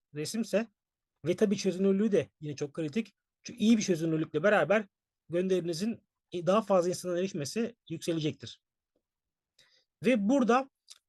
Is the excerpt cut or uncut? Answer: uncut